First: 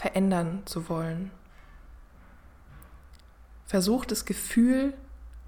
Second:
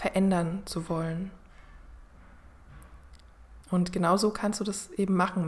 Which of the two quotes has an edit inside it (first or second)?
second